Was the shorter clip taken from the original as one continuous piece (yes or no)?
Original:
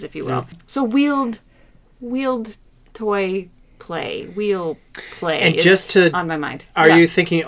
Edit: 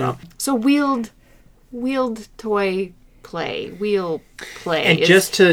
no